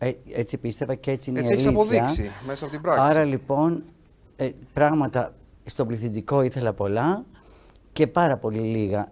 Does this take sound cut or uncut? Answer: uncut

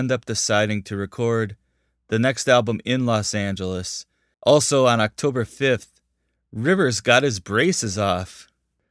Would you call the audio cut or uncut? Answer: cut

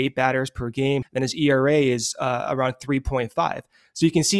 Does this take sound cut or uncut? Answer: cut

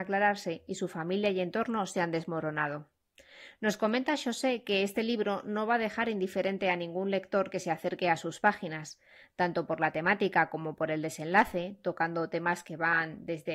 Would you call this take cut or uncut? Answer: uncut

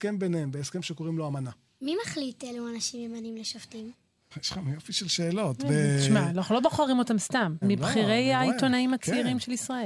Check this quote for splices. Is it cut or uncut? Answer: cut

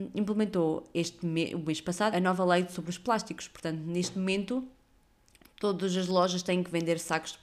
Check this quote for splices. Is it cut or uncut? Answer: cut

